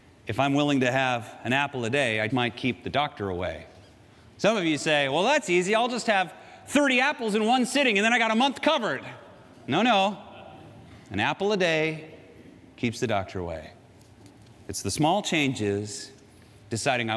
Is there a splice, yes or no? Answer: yes